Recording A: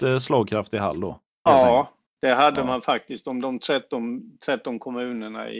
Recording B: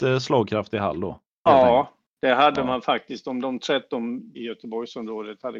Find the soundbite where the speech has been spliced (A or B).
B